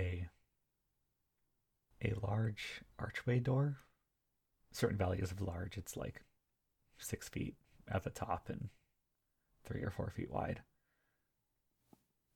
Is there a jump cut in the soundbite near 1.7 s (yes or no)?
no